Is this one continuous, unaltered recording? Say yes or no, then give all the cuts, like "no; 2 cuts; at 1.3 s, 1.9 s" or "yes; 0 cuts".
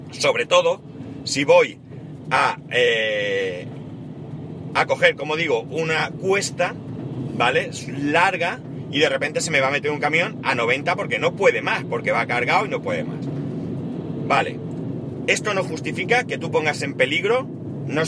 yes; 0 cuts